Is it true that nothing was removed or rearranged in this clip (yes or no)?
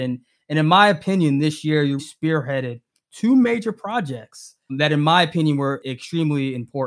no